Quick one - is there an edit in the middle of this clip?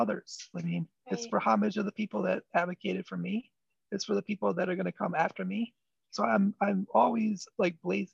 yes; 1 cut; at 1.0 s

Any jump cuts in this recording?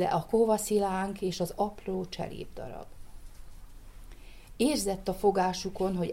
no; 0 cuts

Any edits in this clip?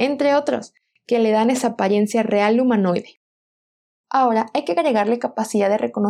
no; 0 cuts

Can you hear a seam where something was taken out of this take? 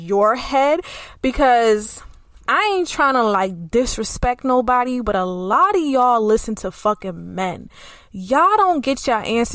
no; 0 cuts

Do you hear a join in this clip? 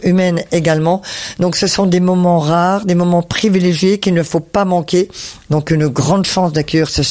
yes; 1 cut; at 5.5 s

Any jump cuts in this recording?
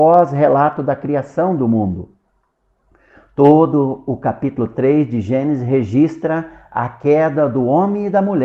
no; 0 cuts

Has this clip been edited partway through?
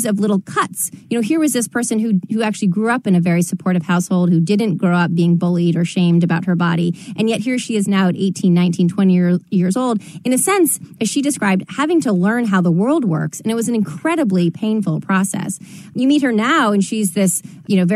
no; 0 cuts

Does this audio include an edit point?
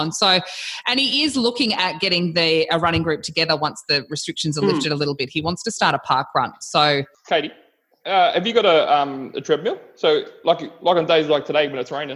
no; 0 cuts

